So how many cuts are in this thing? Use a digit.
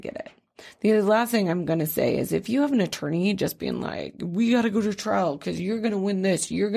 0